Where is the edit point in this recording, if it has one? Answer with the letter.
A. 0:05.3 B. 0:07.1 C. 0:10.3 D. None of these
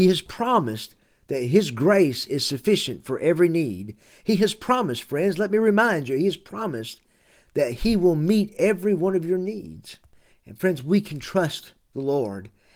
C